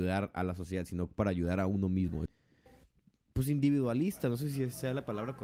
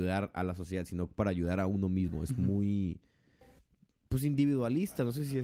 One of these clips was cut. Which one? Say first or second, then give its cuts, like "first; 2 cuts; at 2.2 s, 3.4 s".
first; 1 cut; at 2.3 s